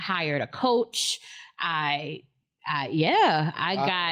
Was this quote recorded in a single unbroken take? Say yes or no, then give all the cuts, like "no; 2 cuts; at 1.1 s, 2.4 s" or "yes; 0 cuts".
yes; 0 cuts